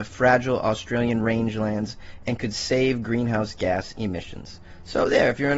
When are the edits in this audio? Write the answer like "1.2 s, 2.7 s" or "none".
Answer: none